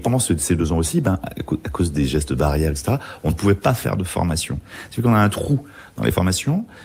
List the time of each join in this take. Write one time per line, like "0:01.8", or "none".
none